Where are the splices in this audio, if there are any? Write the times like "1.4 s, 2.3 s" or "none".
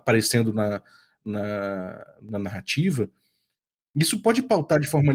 3.9 s